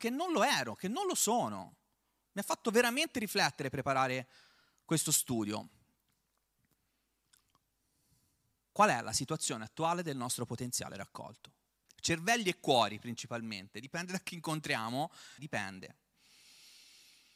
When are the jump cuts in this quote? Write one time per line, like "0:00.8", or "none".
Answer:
0:11.9
0:15.4